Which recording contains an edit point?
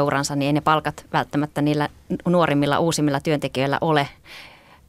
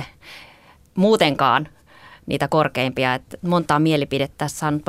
second; 1 cut; at 3.4 s

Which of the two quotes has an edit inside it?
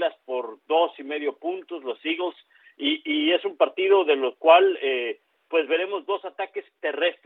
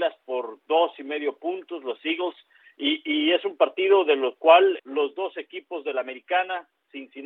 second; 1 cut; at 4.8 s

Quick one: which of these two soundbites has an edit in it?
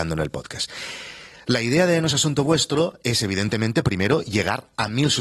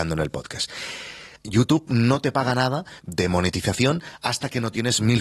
second; 2 cuts; at 1.4 s, 3.0 s

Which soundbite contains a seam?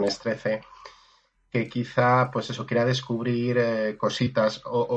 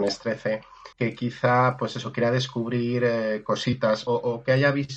second; 2 cuts; at 0.9 s, 4.1 s

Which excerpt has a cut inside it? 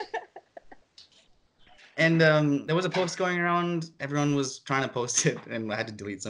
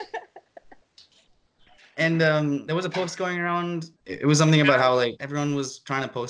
second; 2 cuts; at 4.0 s, 5.2 s

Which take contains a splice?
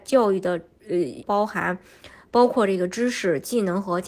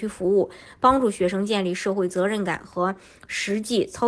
first; 1 cut; at 1.2 s

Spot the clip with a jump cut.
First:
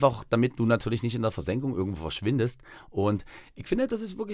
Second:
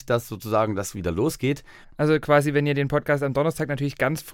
second; 1 cut; at 1.8 s

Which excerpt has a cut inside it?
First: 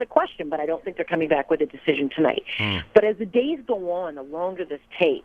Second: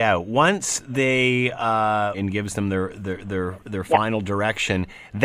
second; 1 cut; at 2.1 s

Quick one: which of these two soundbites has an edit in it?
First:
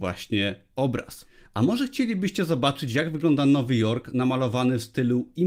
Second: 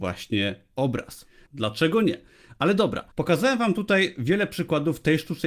second; 2 cuts; at 1.5 s, 3.1 s

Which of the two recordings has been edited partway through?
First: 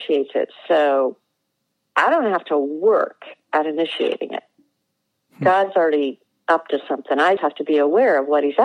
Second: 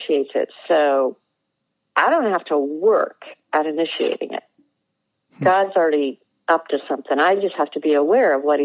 first; 1 cut; at 7.4 s

